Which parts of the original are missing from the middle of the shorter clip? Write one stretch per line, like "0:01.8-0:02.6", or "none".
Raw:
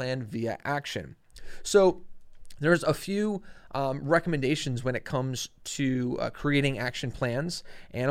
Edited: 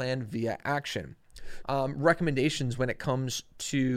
0:01.6-0:03.7